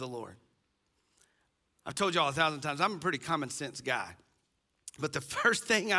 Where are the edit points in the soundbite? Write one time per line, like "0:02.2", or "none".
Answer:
none

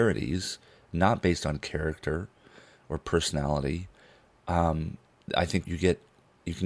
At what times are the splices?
0:05.6

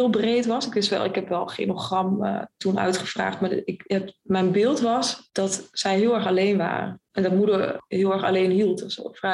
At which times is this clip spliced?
none

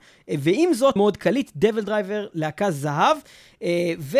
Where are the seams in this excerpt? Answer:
0:01.0

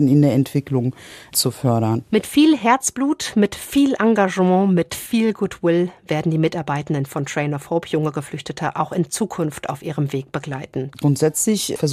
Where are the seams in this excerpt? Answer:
0:10.9

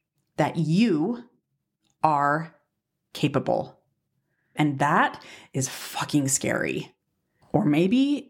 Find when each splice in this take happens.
0:04.6

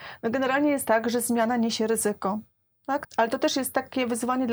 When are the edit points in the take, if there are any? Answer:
0:03.0

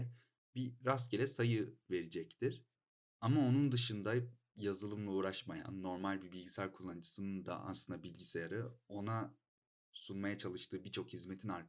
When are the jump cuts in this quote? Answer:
none

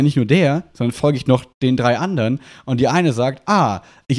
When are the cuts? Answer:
none

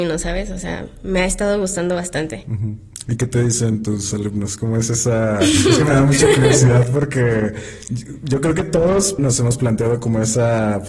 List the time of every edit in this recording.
0:09.2

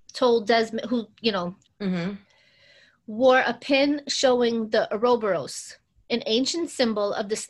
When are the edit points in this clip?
0:01.7
0:06.0

